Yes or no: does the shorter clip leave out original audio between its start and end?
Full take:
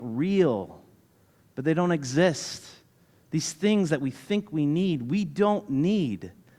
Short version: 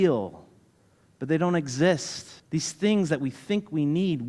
yes